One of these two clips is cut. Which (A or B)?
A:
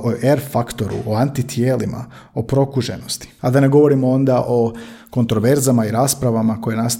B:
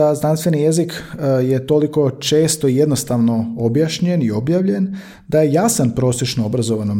A